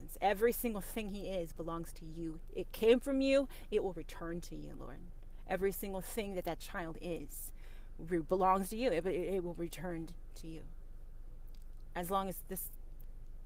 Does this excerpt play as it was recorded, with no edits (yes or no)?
yes